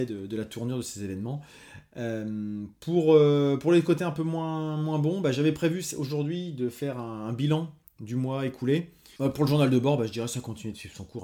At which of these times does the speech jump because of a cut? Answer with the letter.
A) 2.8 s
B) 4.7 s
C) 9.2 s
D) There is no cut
C